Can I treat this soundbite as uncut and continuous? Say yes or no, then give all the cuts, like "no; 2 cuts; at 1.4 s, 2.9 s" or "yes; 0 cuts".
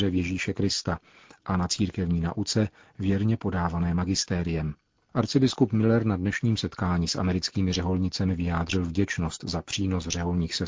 no; 1 cut; at 5.0 s